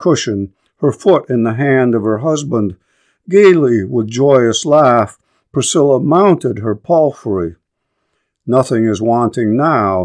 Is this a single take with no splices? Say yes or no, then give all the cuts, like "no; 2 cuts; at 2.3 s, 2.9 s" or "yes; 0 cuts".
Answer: yes; 0 cuts